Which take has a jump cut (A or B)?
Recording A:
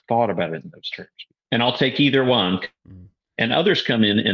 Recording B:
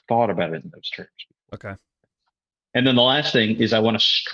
A